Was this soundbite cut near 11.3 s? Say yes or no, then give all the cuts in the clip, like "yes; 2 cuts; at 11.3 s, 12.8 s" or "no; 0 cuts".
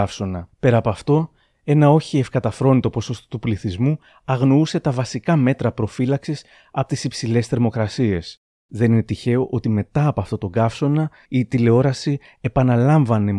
yes; 1 cut; at 11.3 s